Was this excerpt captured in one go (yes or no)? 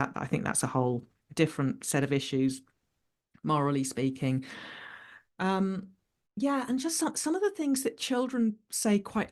yes